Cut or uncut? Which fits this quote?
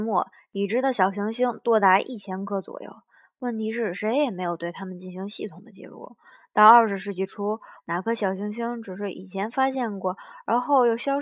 cut